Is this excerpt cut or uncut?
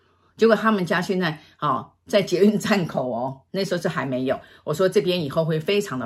cut